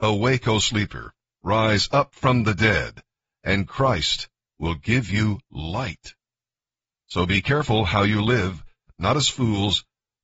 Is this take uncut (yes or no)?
yes